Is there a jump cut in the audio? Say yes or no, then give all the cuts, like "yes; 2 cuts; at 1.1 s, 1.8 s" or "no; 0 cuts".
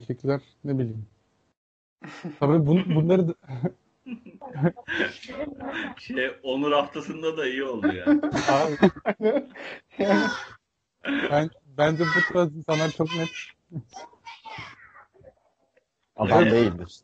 no; 0 cuts